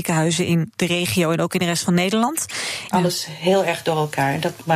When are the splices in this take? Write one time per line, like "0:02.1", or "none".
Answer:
0:02.9